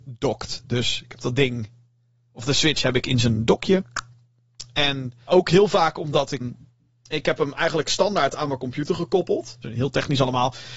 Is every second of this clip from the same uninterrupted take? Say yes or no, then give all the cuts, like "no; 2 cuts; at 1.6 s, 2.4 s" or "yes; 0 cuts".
no; 3 cuts; at 5.3 s, 6.4 s, 9.6 s